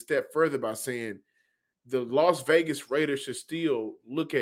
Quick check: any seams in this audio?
no; 0 cuts

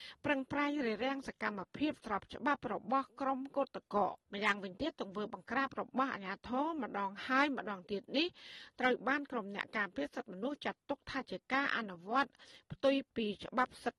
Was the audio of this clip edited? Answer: yes; 1 cut; at 4.2 s

